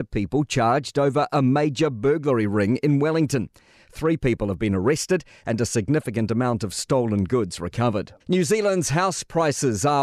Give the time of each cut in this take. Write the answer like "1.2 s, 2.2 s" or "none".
8.2 s